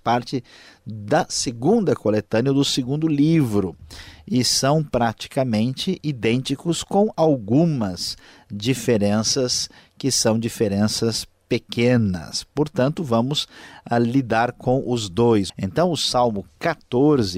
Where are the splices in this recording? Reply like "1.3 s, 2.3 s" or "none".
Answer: 15.5 s